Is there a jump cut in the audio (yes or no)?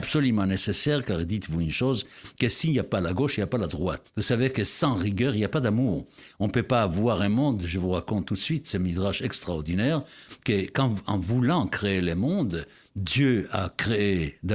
yes